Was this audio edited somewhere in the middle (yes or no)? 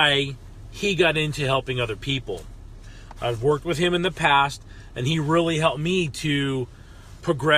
yes